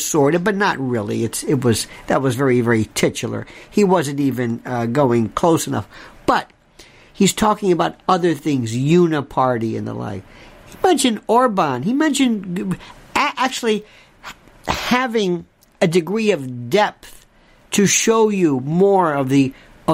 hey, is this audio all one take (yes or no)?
yes